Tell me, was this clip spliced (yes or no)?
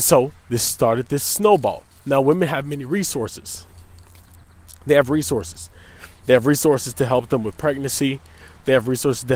no